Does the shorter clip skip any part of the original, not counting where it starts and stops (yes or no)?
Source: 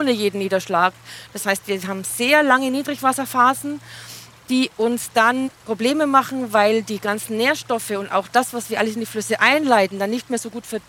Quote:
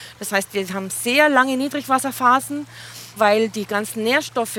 yes